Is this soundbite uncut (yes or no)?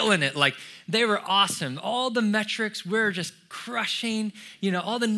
yes